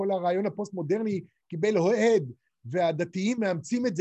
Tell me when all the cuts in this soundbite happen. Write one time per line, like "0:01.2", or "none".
none